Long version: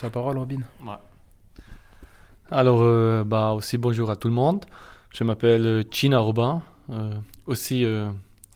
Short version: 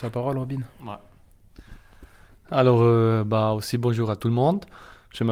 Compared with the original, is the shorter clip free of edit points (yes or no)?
yes